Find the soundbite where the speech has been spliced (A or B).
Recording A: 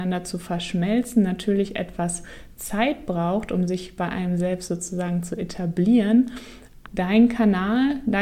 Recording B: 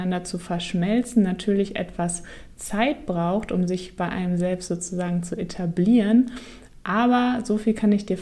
A